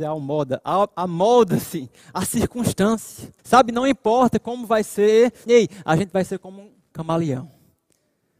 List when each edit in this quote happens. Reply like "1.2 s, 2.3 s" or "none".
3.4 s, 5.5 s